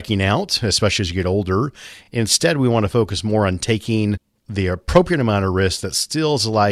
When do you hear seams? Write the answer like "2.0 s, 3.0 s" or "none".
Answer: none